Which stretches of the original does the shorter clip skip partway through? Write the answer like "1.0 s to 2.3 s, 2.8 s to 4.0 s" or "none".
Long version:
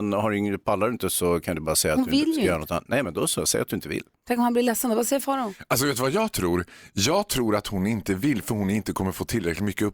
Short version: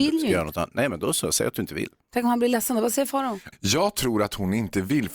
5.7 s to 6.9 s